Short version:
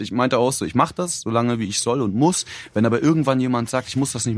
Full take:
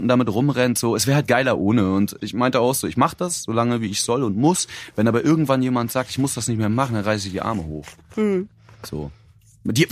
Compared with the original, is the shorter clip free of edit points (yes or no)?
yes